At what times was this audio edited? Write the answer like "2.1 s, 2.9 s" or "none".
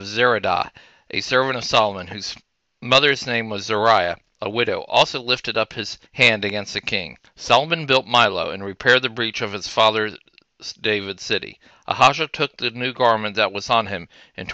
6.1 s, 7.2 s, 11.7 s